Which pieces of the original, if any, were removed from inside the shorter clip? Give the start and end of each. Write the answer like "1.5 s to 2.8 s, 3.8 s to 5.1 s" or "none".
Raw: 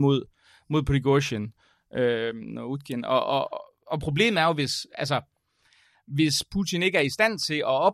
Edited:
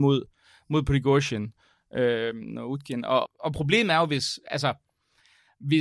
3.2 s to 3.7 s